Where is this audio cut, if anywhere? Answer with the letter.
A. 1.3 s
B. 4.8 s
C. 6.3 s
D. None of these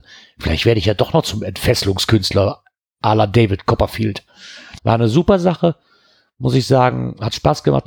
B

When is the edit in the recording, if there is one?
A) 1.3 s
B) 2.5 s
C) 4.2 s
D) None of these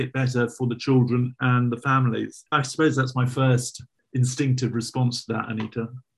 B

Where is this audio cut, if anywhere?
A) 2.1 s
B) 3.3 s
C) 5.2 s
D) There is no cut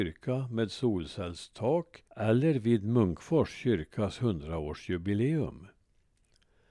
A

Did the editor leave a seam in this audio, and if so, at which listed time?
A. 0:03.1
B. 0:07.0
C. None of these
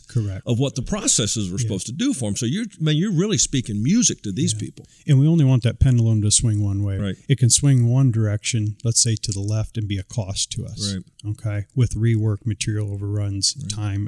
B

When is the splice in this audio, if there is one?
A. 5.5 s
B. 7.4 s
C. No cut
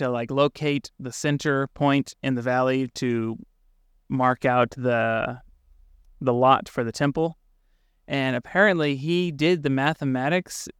C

